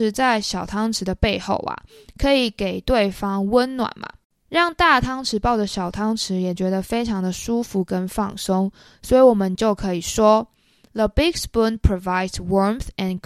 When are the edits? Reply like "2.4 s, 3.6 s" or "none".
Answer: none